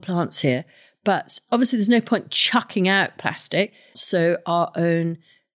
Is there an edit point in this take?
yes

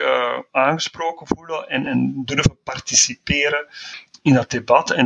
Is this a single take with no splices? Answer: no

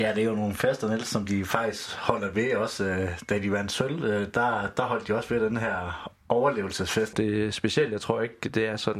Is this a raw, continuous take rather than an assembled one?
no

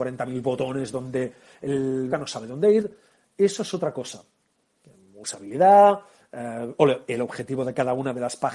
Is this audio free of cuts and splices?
no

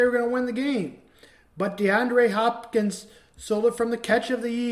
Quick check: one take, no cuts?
yes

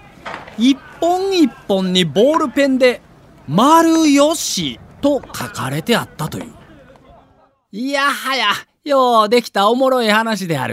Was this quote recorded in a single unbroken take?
yes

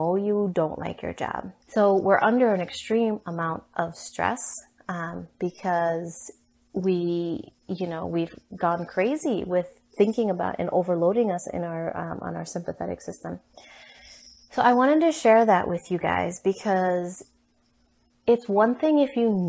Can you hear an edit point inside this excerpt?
yes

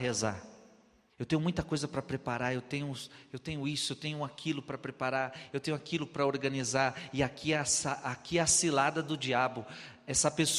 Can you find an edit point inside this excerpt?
yes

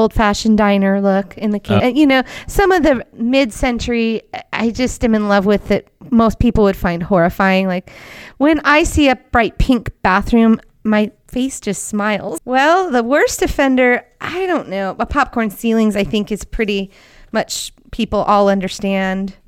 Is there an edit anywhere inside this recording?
yes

